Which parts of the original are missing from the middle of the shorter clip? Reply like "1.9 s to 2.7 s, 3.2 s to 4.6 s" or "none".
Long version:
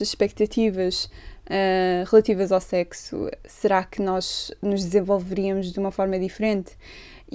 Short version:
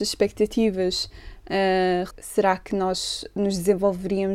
2.1 s to 3.4 s